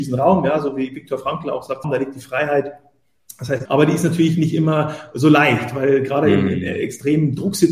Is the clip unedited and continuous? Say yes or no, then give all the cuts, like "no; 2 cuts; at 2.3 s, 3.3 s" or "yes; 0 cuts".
no; 2 cuts; at 1.8 s, 3.7 s